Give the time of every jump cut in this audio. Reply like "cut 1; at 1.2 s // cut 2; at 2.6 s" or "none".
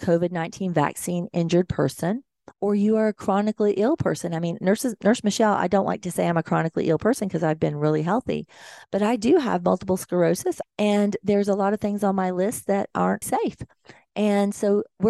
cut 1; at 10.6 s // cut 2; at 13.2 s